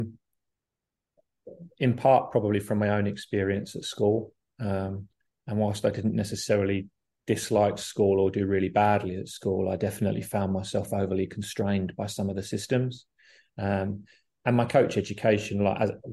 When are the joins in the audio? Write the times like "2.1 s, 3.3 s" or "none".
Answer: none